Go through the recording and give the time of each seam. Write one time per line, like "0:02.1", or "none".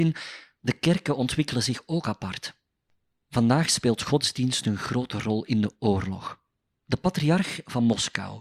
none